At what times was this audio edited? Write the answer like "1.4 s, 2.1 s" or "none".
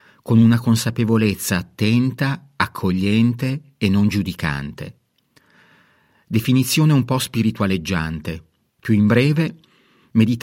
none